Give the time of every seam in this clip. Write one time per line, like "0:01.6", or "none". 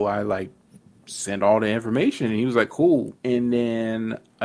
0:03.2